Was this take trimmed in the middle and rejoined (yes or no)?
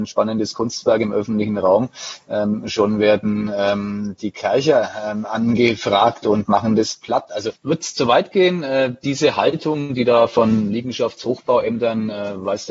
yes